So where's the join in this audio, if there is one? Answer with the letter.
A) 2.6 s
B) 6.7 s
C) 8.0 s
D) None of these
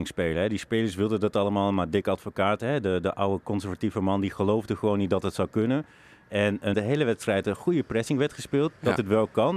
B